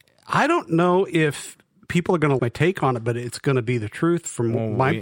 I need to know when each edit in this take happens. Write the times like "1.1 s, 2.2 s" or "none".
2.4 s